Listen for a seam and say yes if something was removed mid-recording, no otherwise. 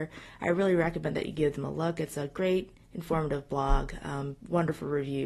no